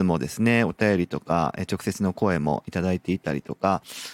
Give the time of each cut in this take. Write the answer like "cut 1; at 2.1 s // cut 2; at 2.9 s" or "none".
none